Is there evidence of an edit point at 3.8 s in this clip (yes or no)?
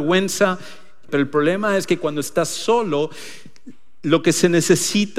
no